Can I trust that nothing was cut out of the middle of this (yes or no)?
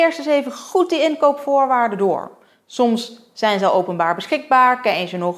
yes